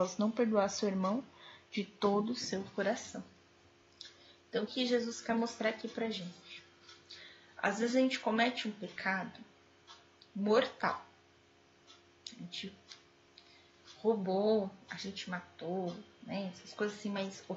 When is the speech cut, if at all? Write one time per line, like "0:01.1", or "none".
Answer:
0:04.7